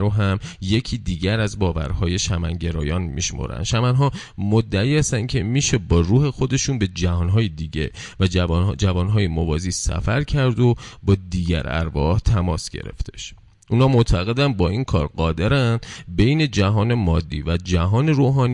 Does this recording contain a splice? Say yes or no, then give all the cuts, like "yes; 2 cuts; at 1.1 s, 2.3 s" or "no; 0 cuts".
no; 0 cuts